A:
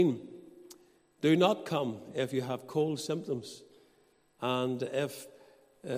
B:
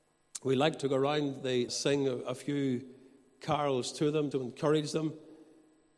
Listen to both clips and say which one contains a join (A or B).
B